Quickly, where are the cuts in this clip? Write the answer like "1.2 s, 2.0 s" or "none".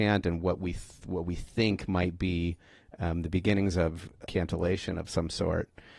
4.3 s